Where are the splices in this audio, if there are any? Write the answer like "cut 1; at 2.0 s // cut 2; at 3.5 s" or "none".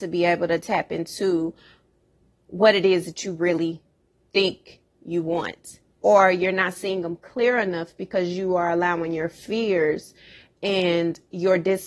cut 1; at 6.0 s